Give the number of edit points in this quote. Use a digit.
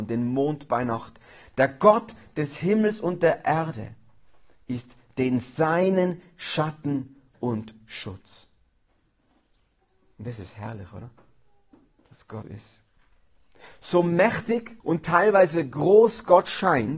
2